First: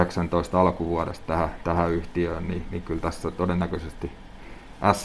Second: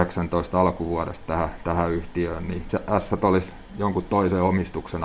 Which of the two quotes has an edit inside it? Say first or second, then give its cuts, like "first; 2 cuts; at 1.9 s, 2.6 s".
second; 1 cut; at 2.7 s